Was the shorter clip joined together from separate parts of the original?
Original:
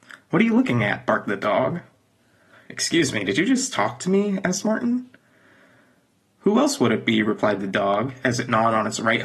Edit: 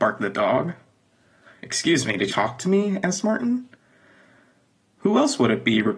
yes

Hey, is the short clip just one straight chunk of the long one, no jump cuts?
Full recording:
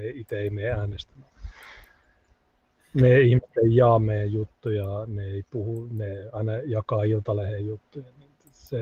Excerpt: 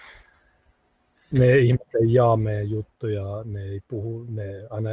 yes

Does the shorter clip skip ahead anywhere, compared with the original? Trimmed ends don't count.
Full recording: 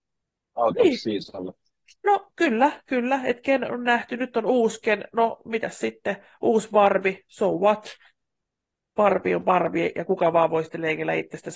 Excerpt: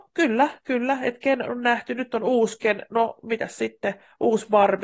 no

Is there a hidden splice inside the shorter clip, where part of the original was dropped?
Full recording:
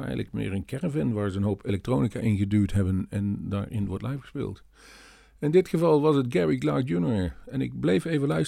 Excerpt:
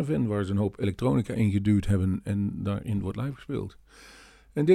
no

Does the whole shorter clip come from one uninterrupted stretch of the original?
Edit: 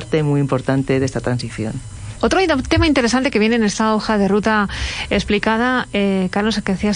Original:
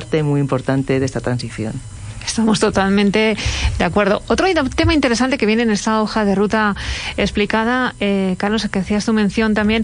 no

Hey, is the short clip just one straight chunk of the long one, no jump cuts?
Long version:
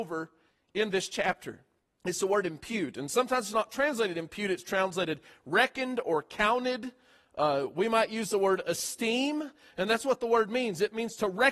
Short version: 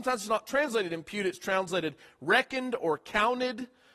yes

